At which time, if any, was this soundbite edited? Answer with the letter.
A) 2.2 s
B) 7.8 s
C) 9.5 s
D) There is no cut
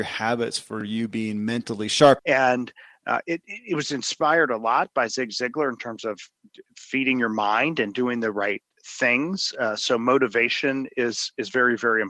A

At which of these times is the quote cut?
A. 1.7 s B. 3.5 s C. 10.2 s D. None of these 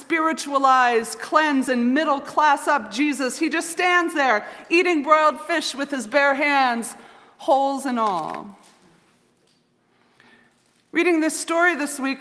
D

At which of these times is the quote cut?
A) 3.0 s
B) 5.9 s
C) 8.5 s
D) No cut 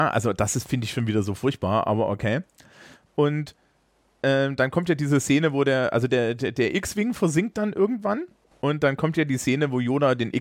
C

